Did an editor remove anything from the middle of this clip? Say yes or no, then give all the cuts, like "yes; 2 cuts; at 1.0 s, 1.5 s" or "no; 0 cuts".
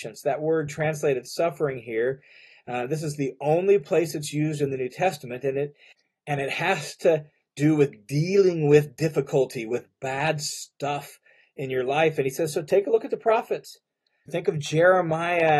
yes; 1 cut; at 14.3 s